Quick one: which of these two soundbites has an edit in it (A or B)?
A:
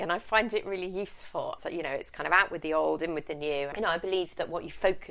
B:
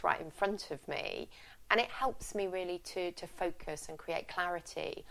A